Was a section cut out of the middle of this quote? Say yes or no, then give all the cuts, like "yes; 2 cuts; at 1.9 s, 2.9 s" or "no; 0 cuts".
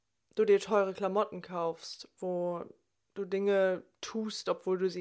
no; 0 cuts